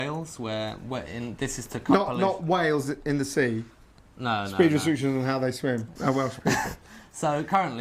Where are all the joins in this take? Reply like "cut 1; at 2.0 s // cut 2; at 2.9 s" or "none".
cut 1; at 6.0 s